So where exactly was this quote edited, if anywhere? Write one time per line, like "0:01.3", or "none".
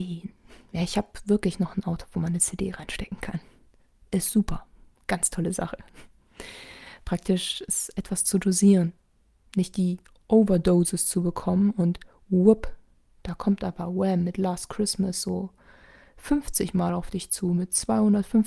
none